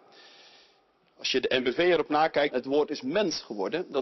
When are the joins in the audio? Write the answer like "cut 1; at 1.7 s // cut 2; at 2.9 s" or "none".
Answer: cut 1; at 2.5 s